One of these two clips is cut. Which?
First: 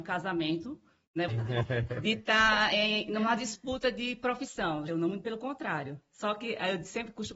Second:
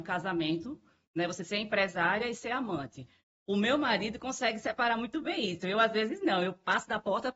first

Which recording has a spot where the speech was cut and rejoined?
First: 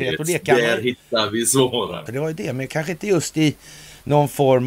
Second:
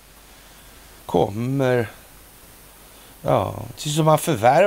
first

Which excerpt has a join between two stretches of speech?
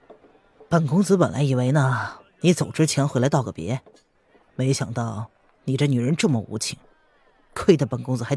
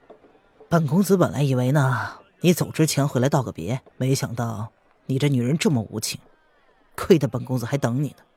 second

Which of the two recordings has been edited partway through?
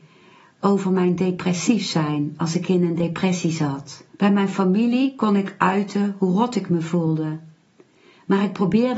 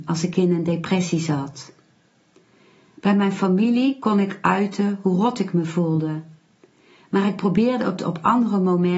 first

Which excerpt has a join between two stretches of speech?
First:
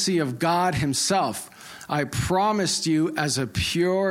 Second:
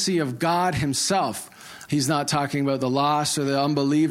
second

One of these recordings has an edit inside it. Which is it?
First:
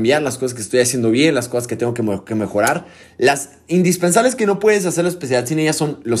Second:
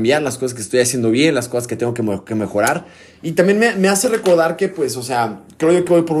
first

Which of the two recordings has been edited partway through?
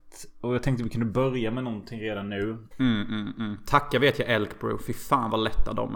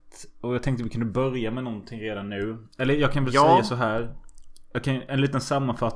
first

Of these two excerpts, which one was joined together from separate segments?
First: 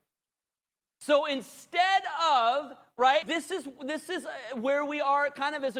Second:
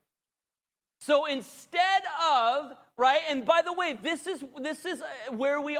first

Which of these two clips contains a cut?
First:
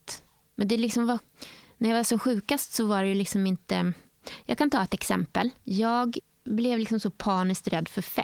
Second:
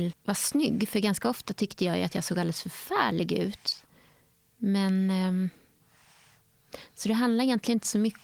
first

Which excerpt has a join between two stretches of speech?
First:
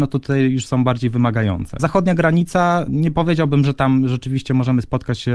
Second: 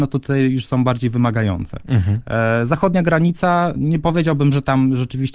first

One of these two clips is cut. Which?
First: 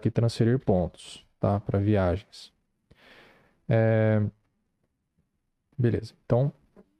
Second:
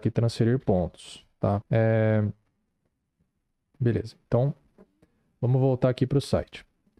second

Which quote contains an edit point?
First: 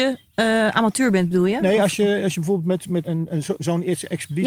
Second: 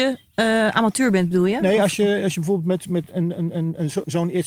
first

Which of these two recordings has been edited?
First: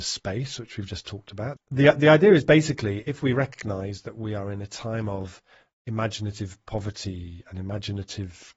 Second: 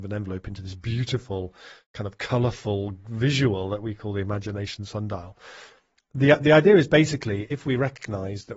first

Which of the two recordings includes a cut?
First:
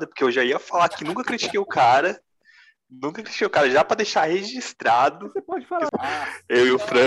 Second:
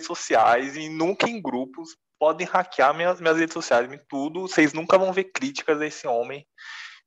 first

